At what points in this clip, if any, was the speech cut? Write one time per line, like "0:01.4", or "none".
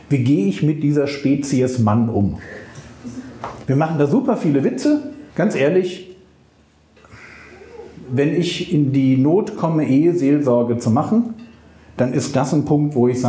0:05.3